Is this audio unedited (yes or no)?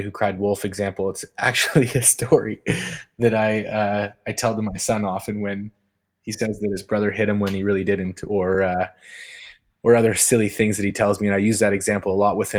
yes